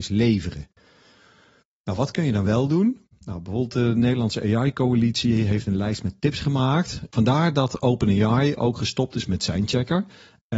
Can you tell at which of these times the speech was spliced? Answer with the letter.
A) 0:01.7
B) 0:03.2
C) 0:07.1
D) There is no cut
C